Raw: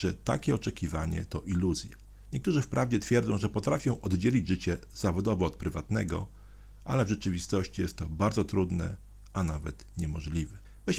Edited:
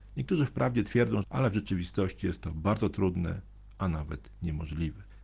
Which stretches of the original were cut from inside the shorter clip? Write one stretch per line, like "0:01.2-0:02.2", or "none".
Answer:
0:03.4-0:06.8